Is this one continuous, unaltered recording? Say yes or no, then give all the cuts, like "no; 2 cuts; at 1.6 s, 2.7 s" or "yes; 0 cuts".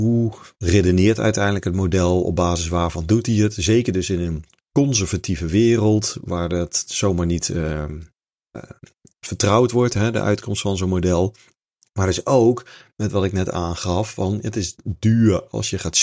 yes; 0 cuts